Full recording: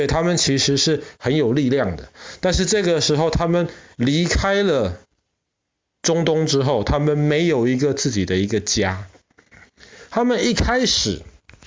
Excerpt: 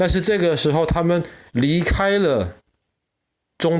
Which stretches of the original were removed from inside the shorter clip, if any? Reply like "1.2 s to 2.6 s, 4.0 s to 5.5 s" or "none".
none